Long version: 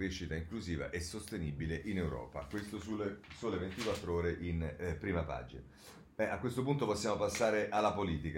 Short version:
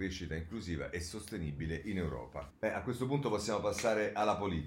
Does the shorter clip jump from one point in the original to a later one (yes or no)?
yes